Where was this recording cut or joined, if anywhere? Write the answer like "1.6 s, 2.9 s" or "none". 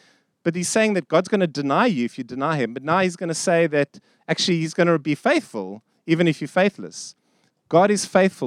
7.5 s